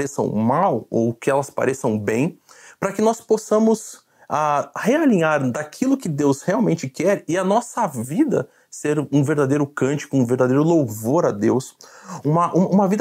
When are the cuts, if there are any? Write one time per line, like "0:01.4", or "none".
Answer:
none